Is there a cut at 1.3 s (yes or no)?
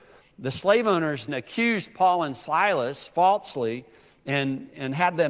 yes